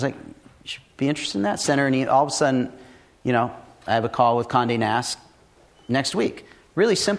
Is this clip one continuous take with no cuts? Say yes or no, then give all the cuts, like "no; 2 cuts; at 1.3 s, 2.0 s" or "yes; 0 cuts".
yes; 0 cuts